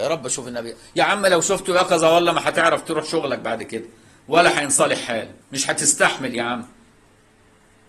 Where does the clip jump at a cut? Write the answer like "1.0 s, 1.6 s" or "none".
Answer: 5.4 s